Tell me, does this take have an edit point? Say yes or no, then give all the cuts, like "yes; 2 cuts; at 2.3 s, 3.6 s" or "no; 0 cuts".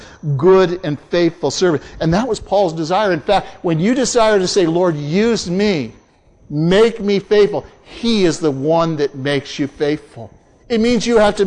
no; 0 cuts